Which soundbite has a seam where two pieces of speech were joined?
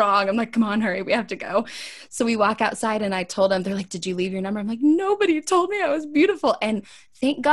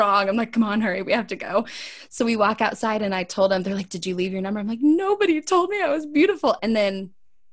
second; 1 cut; at 6.6 s

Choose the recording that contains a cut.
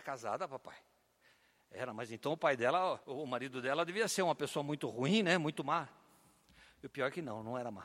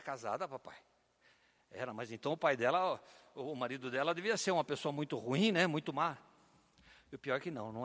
first; 1 cut; at 3.0 s

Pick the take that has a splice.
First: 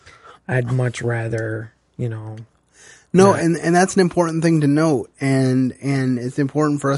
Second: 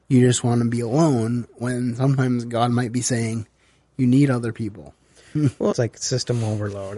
second; 1 cut; at 5.7 s

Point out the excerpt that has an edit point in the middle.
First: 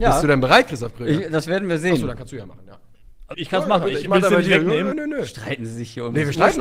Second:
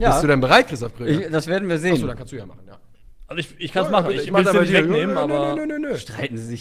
first; 2 cuts; at 3.3 s, 4.9 s

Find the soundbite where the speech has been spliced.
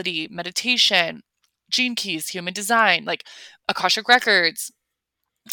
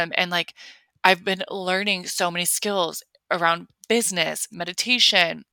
second; 1 cut; at 4.5 s

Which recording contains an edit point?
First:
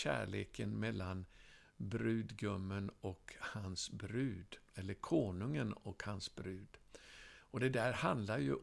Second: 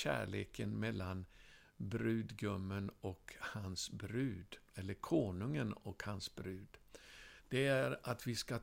second; 1 cut; at 7.4 s

